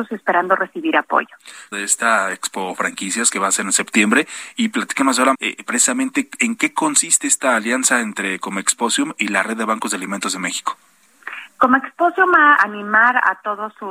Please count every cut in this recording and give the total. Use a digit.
3